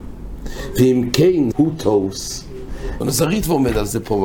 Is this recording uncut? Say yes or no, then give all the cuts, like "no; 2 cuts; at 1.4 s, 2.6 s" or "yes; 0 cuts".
no; 2 cuts; at 1.5 s, 3.0 s